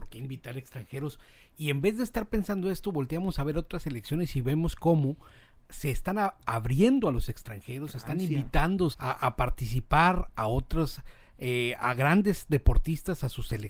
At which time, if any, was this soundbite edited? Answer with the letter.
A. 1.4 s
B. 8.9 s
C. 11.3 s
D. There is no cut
B